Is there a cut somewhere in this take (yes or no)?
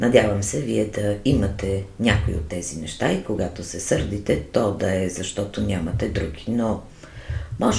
no